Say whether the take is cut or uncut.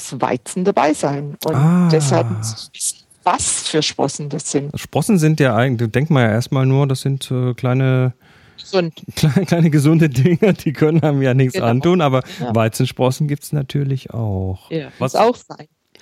cut